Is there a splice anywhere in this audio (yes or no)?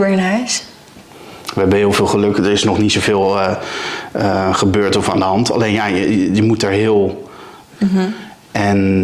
yes